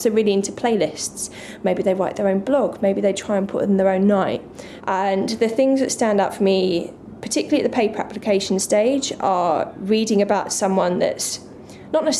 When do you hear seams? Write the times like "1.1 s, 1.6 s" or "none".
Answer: 4.8 s